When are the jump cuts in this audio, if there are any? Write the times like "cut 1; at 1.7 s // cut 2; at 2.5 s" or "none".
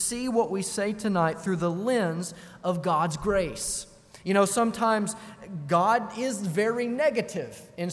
none